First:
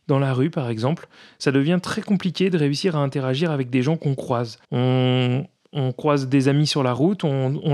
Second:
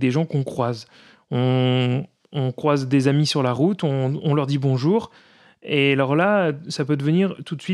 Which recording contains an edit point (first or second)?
first